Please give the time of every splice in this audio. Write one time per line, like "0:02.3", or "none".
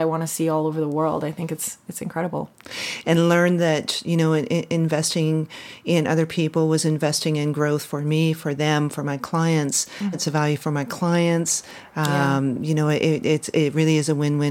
0:03.0
0:10.1